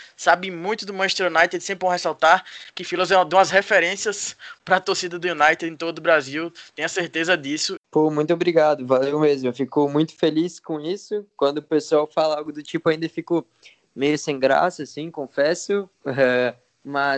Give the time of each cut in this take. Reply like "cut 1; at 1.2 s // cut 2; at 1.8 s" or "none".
cut 1; at 7.8 s